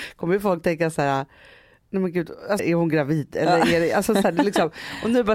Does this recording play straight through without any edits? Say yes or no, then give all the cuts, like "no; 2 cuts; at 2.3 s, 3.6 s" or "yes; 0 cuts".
no; 1 cut; at 2.6 s